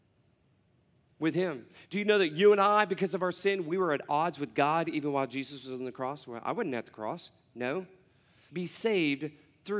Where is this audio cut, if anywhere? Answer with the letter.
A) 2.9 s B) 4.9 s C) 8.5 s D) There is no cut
C